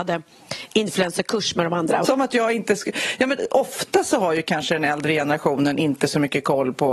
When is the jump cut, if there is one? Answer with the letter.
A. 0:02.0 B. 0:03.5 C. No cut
A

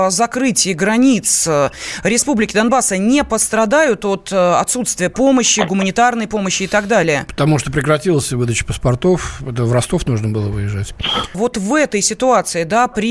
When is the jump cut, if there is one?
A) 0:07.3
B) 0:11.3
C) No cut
B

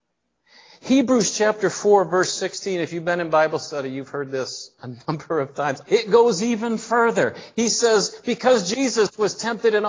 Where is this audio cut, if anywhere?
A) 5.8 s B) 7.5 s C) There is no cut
A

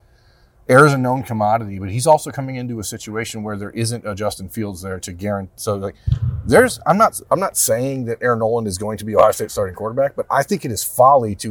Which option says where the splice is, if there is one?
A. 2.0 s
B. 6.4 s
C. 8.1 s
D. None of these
D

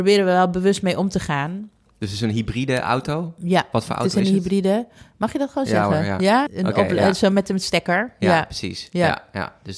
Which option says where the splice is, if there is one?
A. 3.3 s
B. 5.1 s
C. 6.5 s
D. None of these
C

